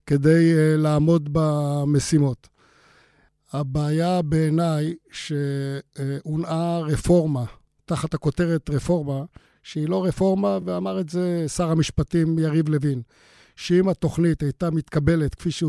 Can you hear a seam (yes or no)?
no